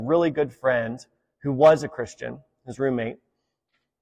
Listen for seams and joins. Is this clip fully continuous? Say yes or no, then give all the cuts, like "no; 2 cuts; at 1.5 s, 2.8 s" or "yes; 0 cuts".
yes; 0 cuts